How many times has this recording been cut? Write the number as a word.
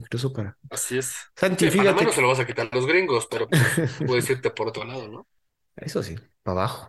one